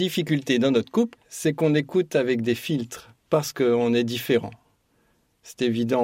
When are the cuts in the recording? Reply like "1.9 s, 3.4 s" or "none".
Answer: 1.2 s, 3.2 s